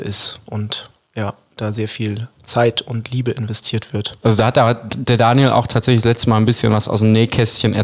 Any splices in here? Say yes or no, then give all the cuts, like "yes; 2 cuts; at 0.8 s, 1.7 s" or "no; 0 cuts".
yes; 1 cut; at 4.2 s